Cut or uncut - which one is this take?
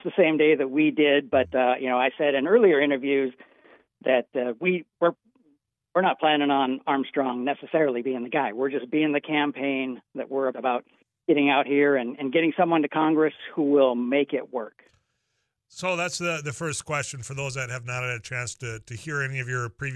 cut